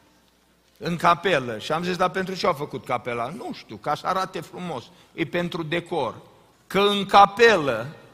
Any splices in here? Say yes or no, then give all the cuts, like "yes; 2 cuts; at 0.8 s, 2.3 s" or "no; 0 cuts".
yes; 1 cut; at 6.5 s